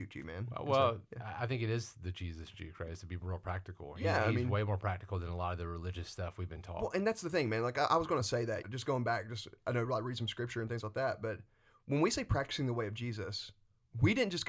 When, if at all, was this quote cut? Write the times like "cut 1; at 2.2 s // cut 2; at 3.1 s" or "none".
cut 1; at 8.6 s